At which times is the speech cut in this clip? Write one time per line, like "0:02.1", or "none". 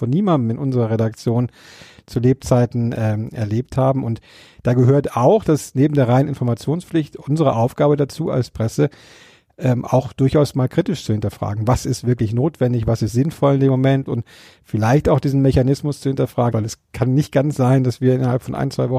0:14.1
0:16.5